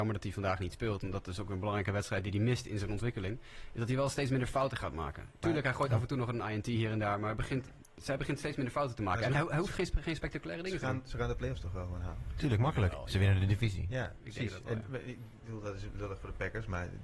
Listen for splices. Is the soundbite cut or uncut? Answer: uncut